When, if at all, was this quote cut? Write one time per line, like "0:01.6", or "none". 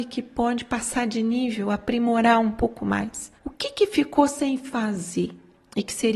0:03.4